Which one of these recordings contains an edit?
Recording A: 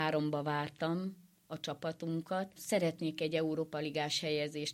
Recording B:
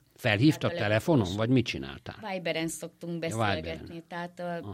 A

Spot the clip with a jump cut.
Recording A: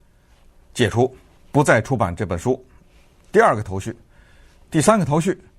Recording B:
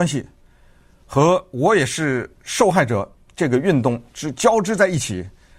A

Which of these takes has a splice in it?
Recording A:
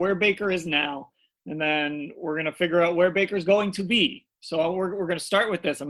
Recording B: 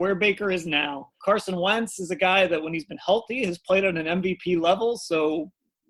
B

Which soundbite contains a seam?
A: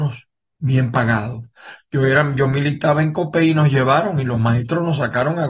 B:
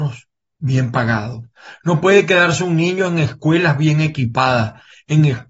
A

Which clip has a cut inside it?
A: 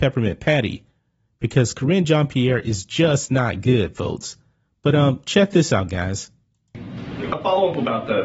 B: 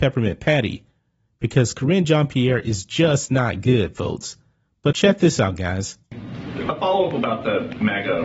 B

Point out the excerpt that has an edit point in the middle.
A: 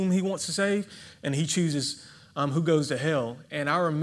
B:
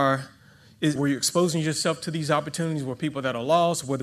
B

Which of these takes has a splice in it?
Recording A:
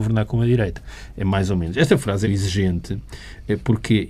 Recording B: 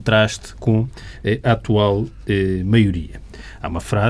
A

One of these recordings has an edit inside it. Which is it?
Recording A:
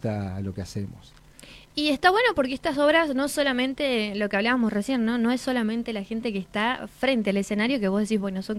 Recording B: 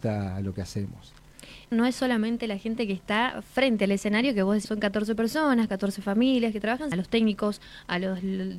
B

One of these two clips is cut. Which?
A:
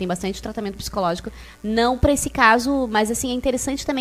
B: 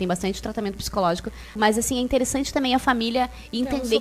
B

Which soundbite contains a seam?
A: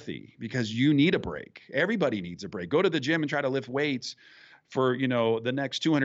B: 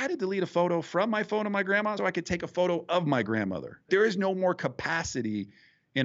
B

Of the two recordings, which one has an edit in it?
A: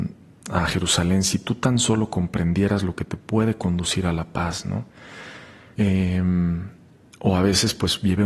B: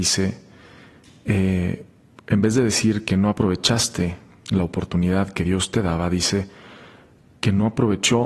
A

